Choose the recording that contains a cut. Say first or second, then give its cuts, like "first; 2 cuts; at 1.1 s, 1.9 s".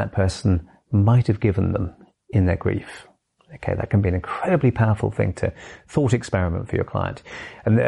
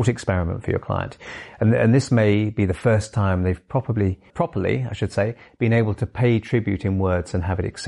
second; 1 cut; at 4.3 s